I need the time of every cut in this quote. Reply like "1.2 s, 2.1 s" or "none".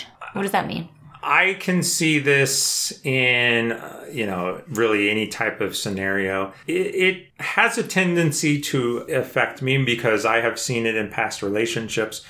none